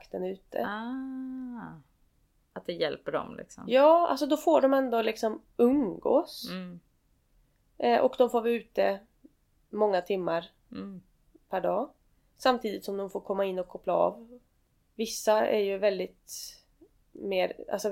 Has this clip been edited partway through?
no; 0 cuts

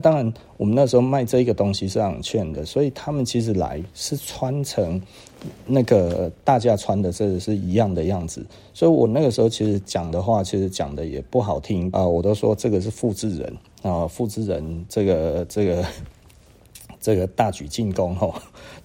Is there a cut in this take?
yes; 1 cut; at 11.9 s

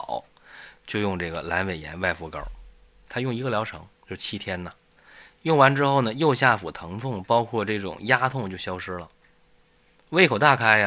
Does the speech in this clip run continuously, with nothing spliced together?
yes; 0 cuts

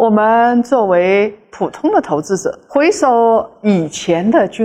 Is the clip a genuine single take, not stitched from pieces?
no; 1 cut; at 2.7 s

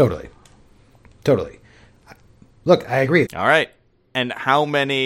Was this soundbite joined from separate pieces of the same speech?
yes; 1 cut; at 3.3 s

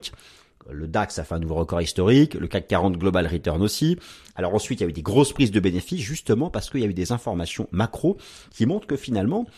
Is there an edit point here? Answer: no; 0 cuts

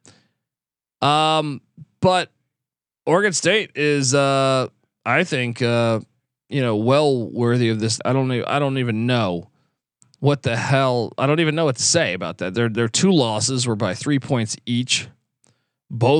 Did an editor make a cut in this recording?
yes; 2 cuts; at 8.0 s, 12.5 s

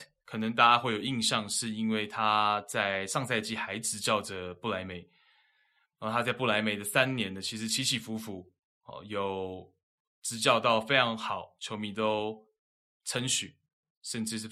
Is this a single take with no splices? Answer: yes; 0 cuts

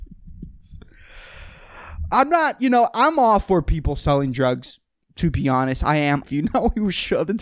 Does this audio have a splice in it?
yes; 1 cut; at 6.2 s

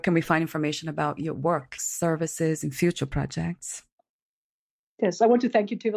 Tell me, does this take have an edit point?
yes; 1 cut; at 1.8 s

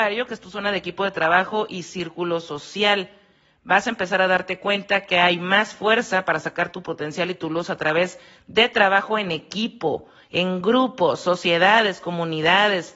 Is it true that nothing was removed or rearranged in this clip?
yes; 0 cuts

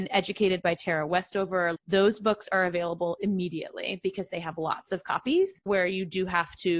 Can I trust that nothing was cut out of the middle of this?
no; 2 cuts; at 1.8 s, 5.7 s

